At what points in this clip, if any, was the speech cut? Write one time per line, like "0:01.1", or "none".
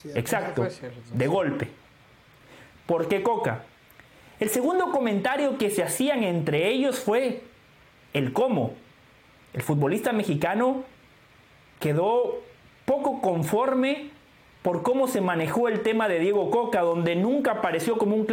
0:02.8